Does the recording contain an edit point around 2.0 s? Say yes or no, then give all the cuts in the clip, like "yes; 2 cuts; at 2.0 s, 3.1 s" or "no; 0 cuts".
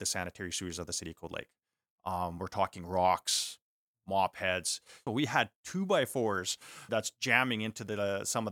no; 2 cuts; at 5.1 s, 6.9 s